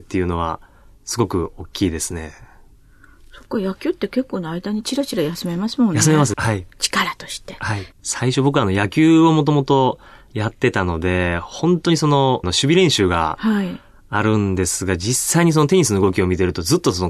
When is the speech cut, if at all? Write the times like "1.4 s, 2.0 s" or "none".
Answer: 6.3 s, 7.9 s, 12.4 s